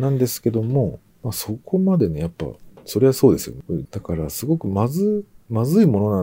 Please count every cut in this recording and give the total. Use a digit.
1